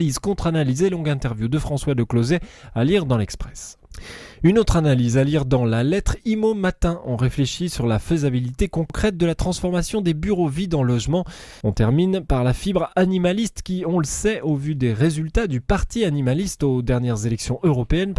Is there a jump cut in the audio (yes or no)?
yes